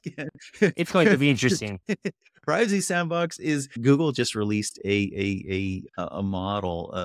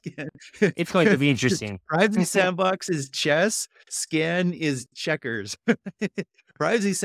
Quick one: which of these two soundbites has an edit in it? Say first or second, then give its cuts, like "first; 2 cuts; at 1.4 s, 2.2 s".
first; 1 cut; at 1.8 s